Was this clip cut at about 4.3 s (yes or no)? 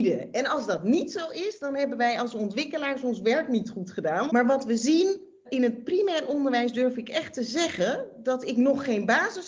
yes